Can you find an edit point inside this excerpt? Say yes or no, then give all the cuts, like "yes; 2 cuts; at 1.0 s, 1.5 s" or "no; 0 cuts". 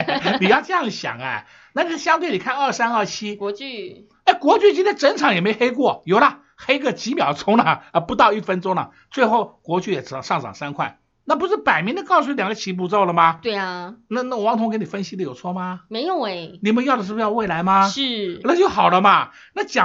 no; 0 cuts